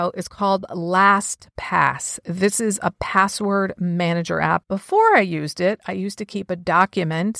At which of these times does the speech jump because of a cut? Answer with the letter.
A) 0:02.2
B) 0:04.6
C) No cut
B